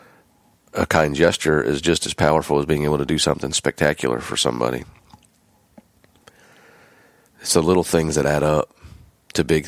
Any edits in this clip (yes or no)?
no